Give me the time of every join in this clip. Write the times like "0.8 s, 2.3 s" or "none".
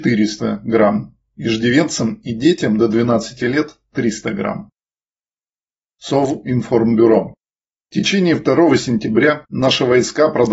none